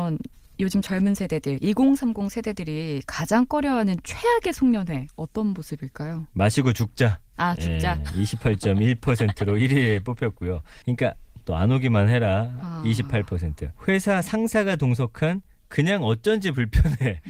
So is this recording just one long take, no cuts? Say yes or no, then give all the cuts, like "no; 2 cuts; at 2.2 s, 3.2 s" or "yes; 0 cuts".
no; 2 cuts; at 10.8 s, 13.8 s